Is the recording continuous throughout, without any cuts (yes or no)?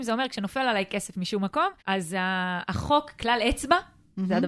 no